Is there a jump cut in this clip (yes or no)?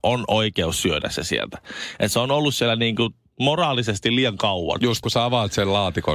yes